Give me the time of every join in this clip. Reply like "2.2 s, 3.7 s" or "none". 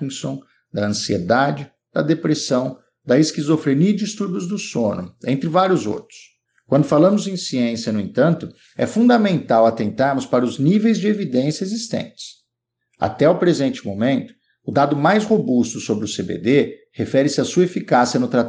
none